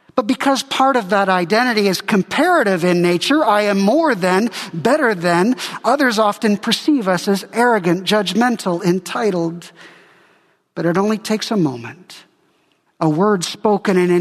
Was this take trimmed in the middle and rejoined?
yes; 1 cut; at 12.9 s

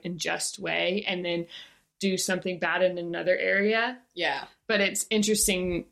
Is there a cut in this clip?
no; 0 cuts

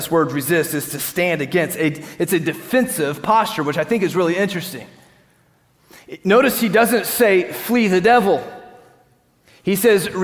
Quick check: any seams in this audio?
no; 0 cuts

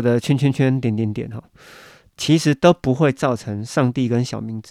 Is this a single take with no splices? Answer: yes; 0 cuts

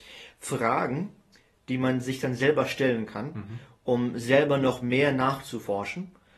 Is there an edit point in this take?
no; 0 cuts

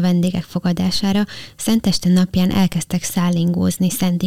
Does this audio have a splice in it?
no; 0 cuts

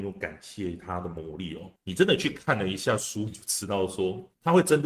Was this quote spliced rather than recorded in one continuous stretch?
yes; 1 cut; at 1.8 s

